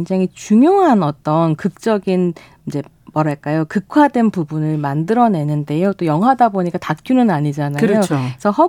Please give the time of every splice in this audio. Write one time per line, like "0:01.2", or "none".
none